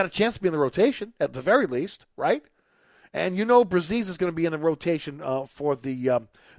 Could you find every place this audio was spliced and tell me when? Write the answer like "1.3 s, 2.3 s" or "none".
none